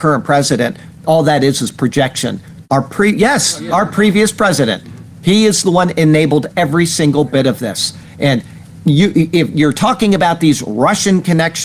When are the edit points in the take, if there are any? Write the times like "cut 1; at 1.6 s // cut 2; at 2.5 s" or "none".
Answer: cut 1; at 2.6 s